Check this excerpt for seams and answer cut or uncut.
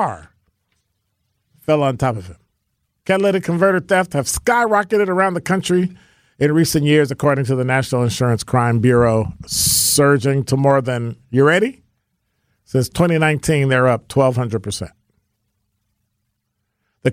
uncut